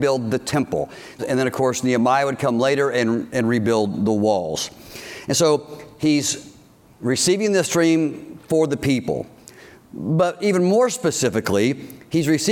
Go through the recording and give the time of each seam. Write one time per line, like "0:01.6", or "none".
0:01.2